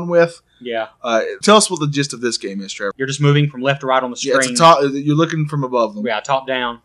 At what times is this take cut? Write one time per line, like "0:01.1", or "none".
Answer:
0:01.4
0:02.9